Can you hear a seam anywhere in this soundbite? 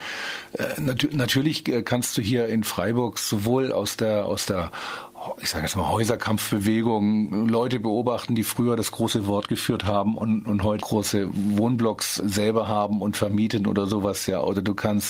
yes; 2 cuts; at 10.8 s, 12.2 s

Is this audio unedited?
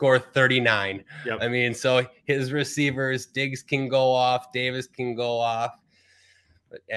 yes; 0 cuts

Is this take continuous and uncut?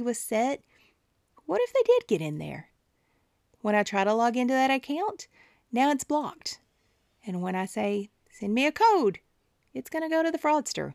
no; 1 cut; at 3.5 s

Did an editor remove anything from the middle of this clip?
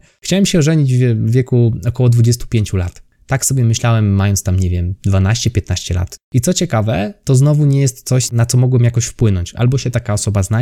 yes; 1 cut; at 6.2 s

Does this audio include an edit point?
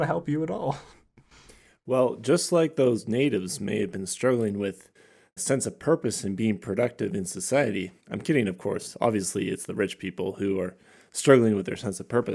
yes; 2 cuts; at 5.4 s, 8.0 s

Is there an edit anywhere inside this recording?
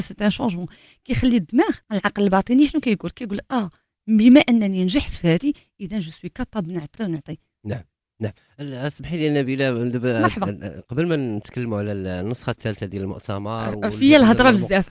yes; 2 cuts; at 1.8 s, 7.0 s

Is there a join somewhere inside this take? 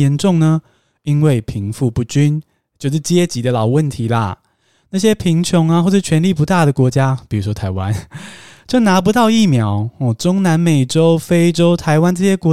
no; 0 cuts

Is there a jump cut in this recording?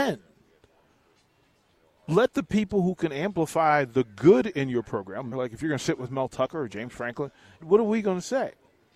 yes; 2 cuts; at 5.3 s, 7.6 s

